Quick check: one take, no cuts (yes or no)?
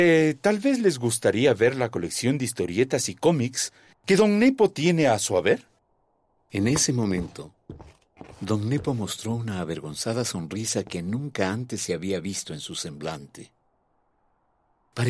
yes